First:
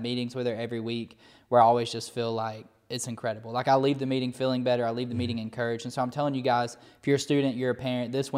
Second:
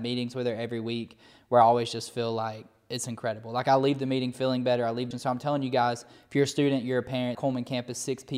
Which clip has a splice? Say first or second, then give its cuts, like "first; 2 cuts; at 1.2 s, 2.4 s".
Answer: second; 2 cuts; at 5.1 s, 7.3 s